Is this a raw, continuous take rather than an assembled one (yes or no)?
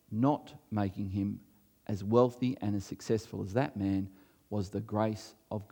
yes